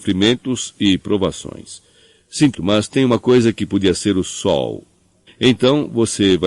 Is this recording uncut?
no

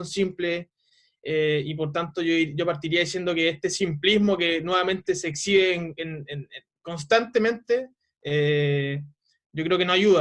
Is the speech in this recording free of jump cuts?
yes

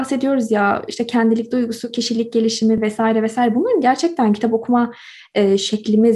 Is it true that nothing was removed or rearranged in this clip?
yes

